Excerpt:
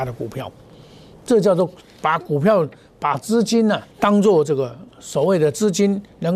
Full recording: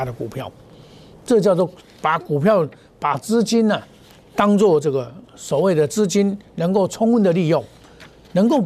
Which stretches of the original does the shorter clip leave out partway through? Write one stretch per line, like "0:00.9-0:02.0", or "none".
0:03.9-0:04.3